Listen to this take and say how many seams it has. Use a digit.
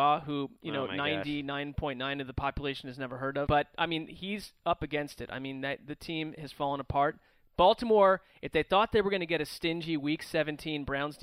1